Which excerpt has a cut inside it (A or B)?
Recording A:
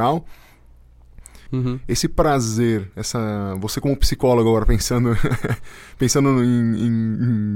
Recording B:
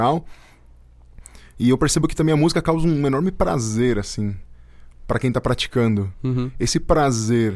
A